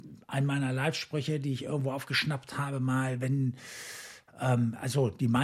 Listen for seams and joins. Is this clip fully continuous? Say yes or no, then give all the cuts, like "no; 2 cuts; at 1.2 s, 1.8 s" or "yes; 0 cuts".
yes; 0 cuts